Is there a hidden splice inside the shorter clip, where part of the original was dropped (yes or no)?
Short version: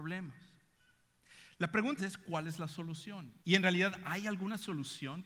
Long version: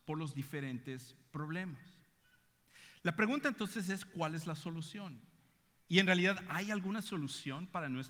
yes